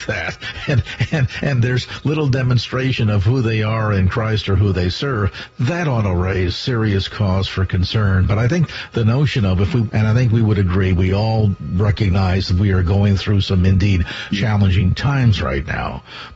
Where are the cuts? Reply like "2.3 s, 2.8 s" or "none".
9.9 s, 14.3 s